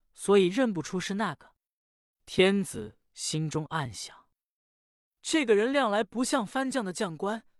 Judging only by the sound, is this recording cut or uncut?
uncut